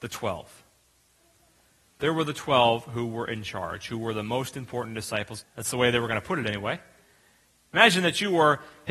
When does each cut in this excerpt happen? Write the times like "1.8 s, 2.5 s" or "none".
5.4 s